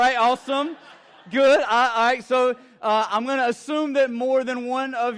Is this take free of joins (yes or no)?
yes